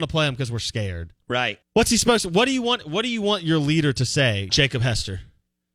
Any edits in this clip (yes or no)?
yes